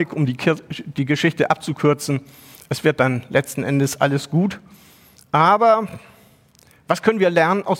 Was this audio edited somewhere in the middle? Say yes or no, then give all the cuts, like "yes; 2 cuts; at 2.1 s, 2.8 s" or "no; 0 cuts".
no; 0 cuts